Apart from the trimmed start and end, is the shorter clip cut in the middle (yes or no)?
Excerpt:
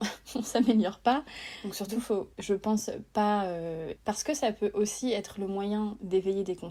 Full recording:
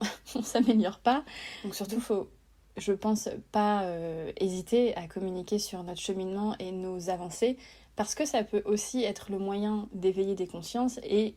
yes